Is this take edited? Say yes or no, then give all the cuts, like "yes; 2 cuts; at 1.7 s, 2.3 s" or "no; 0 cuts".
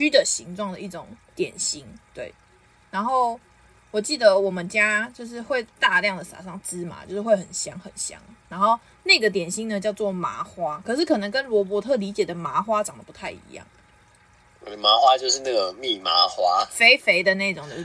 no; 0 cuts